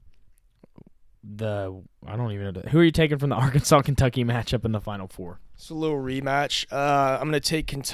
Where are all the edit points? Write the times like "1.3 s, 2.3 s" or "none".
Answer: none